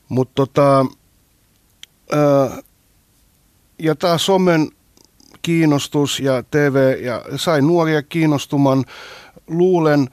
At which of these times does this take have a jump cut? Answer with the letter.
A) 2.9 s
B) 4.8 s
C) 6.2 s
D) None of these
C